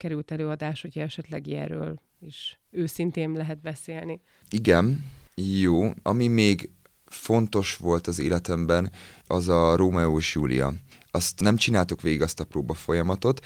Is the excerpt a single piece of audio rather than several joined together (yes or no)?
no